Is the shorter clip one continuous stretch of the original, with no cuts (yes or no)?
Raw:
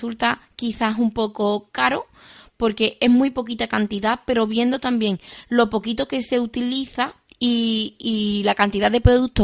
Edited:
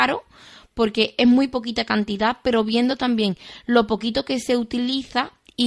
yes